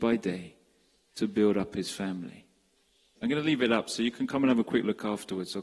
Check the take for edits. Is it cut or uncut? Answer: cut